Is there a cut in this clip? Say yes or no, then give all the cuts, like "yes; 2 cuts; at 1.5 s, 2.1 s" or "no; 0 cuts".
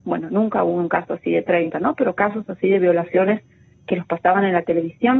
no; 0 cuts